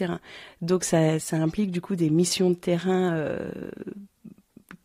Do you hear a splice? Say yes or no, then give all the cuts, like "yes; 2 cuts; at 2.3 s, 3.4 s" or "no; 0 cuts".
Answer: yes; 1 cut; at 1.2 s